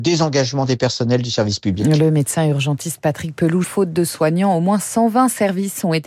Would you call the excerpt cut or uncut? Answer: cut